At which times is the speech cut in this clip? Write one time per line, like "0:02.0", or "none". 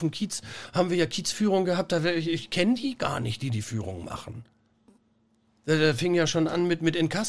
none